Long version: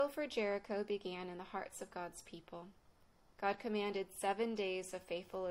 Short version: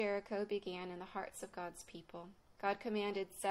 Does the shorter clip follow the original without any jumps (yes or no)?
no